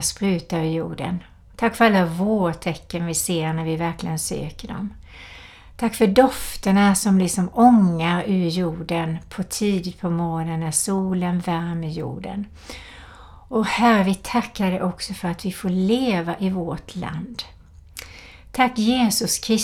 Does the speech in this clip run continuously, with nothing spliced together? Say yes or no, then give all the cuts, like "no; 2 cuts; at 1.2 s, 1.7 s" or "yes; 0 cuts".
yes; 0 cuts